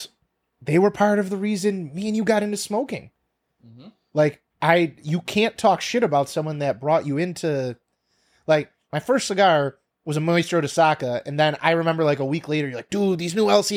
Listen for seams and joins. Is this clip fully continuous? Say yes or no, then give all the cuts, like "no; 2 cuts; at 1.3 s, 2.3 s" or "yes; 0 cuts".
yes; 0 cuts